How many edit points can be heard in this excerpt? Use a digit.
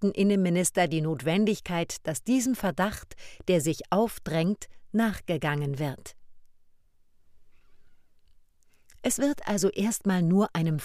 0